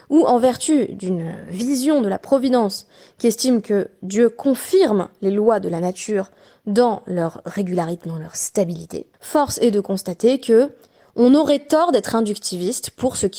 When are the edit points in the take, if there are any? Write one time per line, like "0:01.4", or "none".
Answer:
0:09.1